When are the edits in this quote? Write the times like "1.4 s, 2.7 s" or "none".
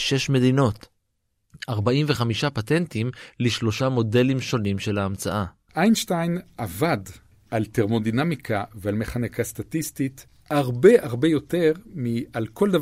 none

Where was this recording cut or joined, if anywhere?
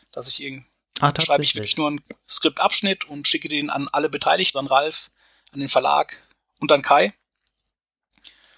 4.5 s

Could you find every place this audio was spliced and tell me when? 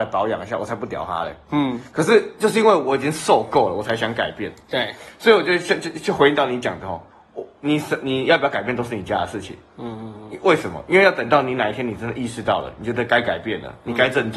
none

